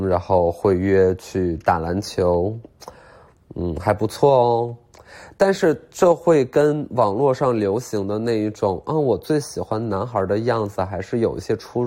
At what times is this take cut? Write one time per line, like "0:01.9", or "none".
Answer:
none

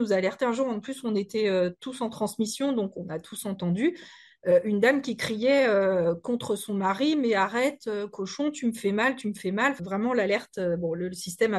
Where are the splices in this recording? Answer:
0:09.8

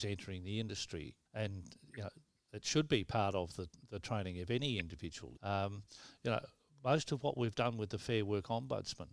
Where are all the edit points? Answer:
0:01.3
0:05.4

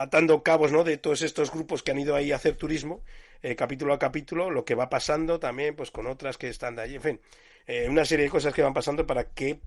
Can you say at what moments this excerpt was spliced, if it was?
none

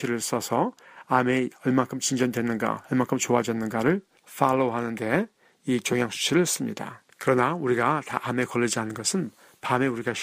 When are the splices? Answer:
0:07.1

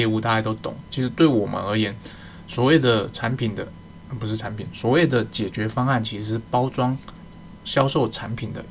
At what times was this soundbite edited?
none

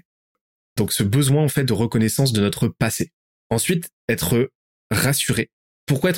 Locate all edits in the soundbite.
none

